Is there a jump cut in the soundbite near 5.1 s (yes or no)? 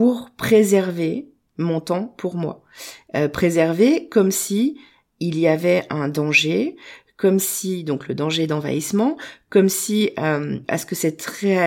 no